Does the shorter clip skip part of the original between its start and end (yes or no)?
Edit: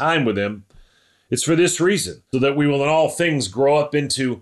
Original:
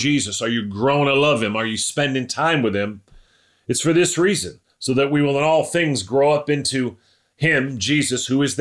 yes